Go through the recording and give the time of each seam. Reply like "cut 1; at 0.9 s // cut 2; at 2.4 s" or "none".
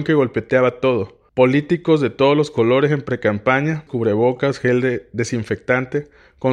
cut 1; at 1.3 s // cut 2; at 3.9 s